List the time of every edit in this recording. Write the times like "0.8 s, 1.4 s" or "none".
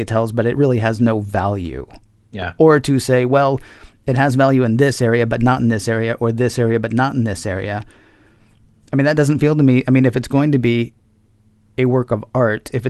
none